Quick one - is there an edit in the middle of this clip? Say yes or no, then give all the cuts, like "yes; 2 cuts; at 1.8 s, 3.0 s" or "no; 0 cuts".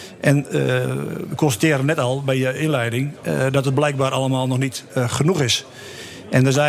no; 0 cuts